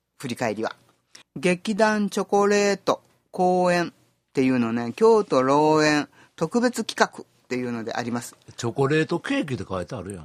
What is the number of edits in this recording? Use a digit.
1